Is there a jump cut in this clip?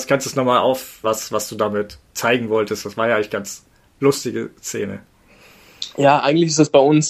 yes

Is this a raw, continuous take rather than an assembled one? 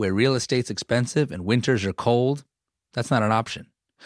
yes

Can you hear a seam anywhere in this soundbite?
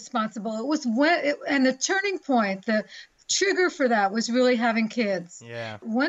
no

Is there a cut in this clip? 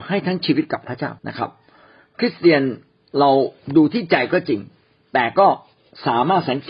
yes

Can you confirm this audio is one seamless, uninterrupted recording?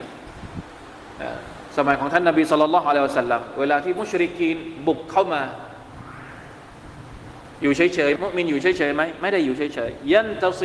no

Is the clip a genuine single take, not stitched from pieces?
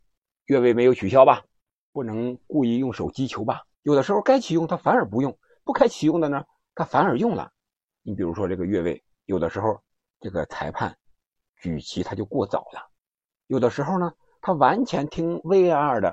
no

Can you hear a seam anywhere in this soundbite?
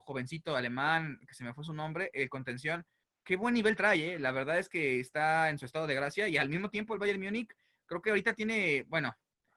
no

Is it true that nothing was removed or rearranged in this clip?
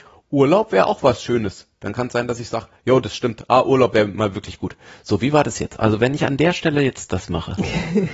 yes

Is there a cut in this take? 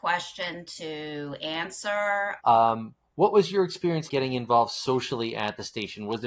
yes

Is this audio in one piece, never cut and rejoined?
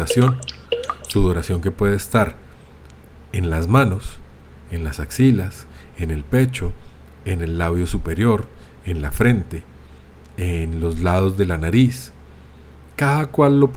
yes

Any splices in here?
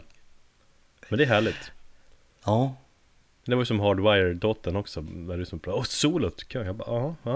no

